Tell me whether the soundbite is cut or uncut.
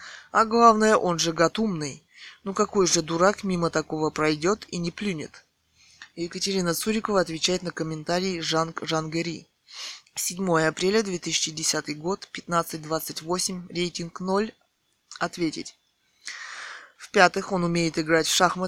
cut